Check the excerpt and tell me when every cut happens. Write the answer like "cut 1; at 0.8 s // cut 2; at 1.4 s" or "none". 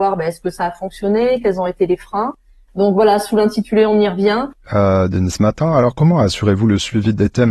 cut 1; at 4.6 s